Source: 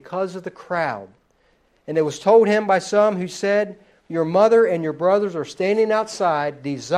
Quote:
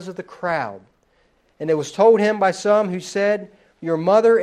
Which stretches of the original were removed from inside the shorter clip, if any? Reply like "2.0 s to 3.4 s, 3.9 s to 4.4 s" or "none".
none